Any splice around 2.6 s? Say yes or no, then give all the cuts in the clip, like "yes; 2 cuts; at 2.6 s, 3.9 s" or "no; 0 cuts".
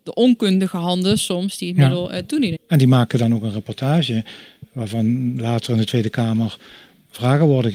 yes; 1 cut; at 2.6 s